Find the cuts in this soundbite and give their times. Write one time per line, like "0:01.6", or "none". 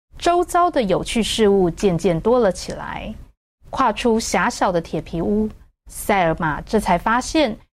0:03.5